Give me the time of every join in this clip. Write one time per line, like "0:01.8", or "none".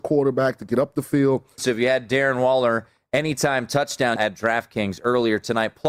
0:01.6
0:04.2